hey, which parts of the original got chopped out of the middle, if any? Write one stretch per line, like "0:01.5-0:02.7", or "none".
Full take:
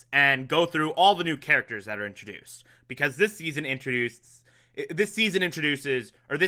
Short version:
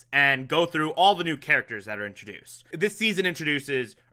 0:02.7-0:04.9